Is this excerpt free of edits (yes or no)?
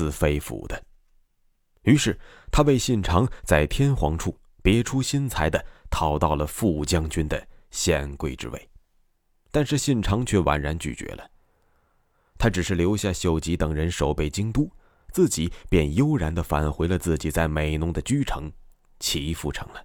yes